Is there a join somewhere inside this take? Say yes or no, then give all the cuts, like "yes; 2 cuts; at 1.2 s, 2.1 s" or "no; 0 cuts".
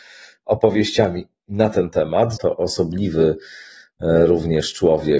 yes; 1 cut; at 2.4 s